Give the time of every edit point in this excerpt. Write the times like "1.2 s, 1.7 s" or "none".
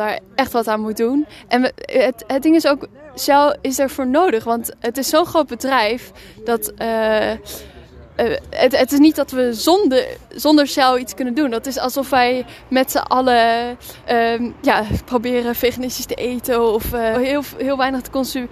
14.0 s, 17.1 s